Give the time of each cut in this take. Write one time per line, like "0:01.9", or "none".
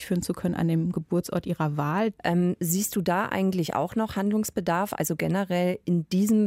0:02.2

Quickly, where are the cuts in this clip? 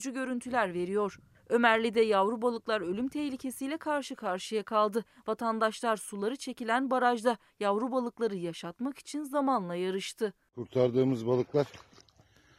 none

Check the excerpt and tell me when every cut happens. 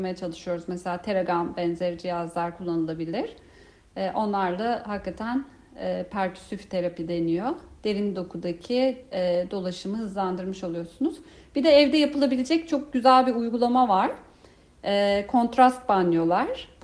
none

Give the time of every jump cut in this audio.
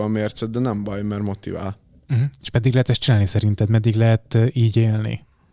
none

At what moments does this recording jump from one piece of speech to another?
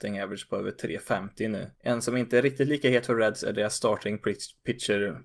0:01.7

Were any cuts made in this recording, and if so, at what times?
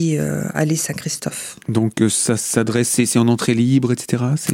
0:01.6

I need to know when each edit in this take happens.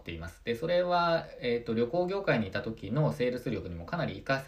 none

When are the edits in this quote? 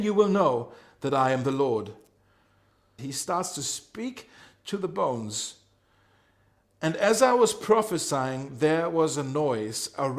0:03.0

